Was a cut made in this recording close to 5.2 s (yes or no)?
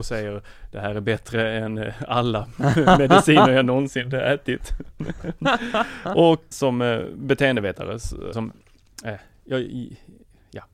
no